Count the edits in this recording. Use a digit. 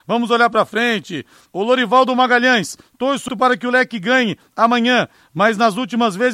1